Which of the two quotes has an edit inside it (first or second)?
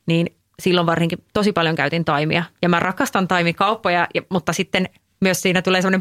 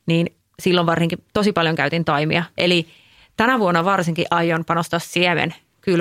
second